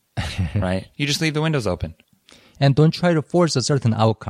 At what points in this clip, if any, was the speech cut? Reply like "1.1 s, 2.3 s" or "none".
0.9 s